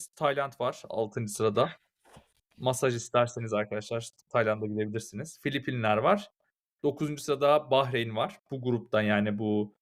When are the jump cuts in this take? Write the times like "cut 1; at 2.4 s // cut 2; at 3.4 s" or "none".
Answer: none